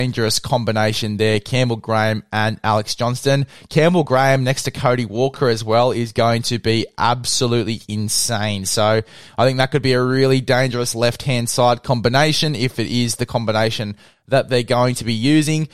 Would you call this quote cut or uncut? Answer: uncut